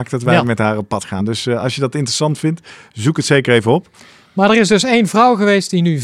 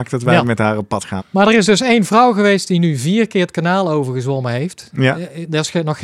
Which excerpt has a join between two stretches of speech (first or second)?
second